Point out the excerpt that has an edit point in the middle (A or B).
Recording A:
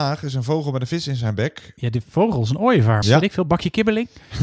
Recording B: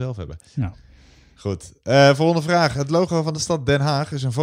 A